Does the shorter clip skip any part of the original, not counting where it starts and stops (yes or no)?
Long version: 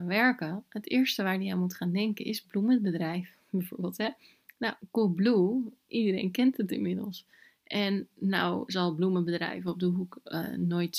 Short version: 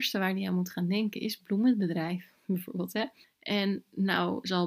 yes